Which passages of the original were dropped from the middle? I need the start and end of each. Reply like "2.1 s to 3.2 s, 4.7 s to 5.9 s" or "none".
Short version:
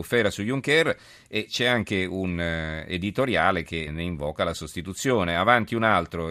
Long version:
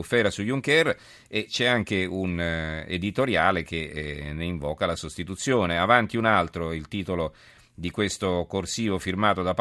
3.9 s to 4.3 s